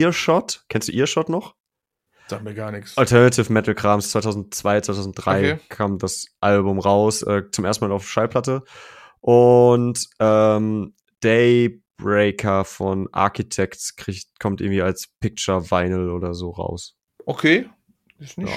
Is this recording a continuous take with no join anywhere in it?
yes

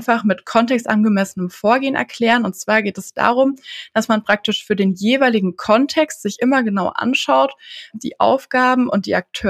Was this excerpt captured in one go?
no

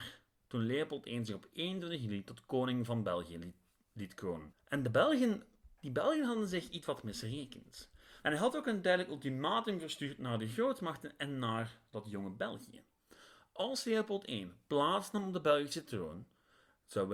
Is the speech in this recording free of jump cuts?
no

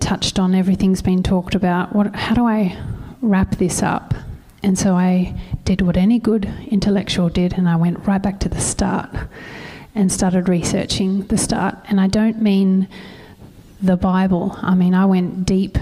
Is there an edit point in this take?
no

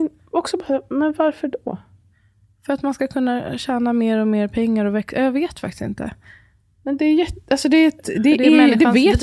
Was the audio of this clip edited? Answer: no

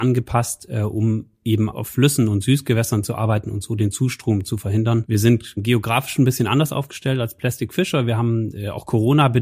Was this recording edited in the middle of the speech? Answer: no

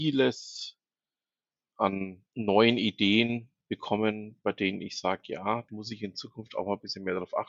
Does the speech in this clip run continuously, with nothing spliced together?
no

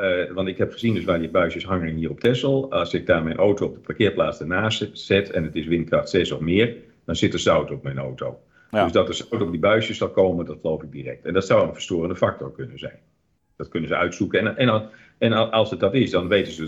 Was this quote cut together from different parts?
no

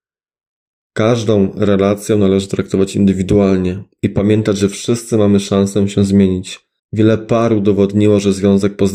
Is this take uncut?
no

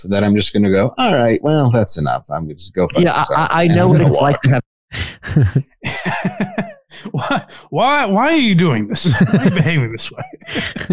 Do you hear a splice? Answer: no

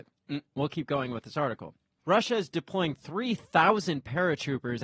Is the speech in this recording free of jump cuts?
no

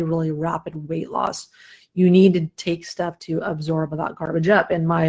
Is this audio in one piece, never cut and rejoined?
yes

